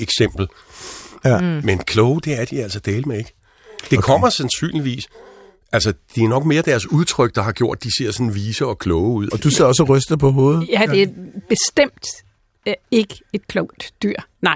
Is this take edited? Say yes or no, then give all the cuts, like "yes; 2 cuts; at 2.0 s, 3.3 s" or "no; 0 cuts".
yes; 2 cuts; at 1.2 s, 9.3 s